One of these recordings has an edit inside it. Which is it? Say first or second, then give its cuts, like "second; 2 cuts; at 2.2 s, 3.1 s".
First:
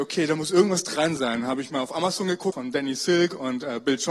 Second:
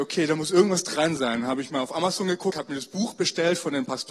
first; 1 cut; at 2.5 s